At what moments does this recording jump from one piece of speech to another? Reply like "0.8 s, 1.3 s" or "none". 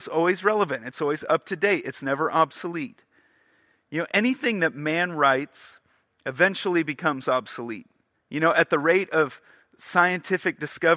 8.1 s